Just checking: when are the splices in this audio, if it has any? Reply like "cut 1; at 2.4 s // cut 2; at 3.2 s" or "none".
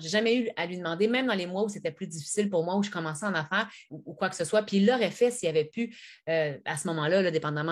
cut 1; at 3.9 s